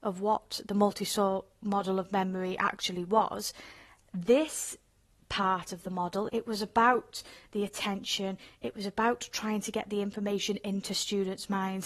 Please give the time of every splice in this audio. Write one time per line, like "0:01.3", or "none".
0:06.3